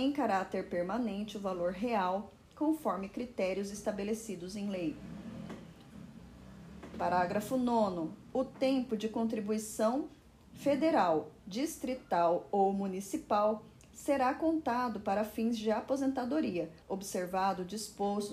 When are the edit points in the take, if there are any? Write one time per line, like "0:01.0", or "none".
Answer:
0:11.4
0:16.8